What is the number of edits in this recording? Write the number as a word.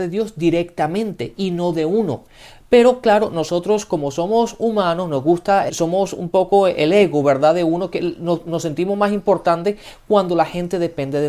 one